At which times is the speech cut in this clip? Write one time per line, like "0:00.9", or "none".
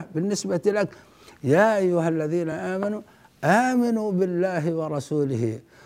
none